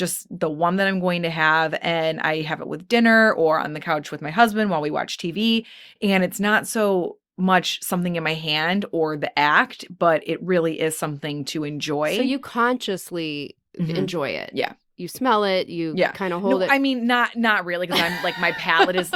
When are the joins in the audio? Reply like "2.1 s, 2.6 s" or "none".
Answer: none